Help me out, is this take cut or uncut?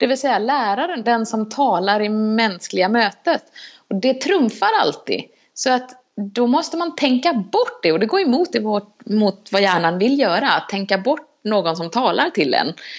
cut